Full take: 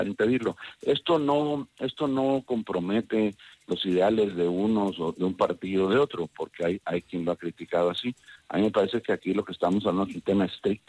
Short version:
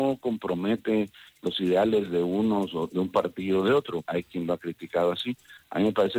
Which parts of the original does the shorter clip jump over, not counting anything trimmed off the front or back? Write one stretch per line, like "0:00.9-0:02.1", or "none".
0:06.3-0:06.8